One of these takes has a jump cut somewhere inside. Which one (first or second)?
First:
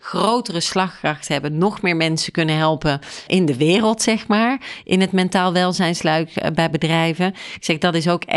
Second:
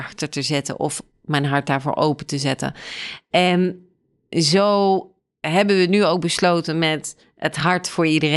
first